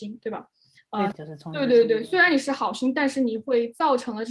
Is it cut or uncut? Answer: cut